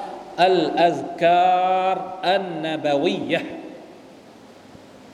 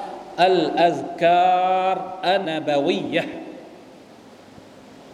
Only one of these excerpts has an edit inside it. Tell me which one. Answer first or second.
second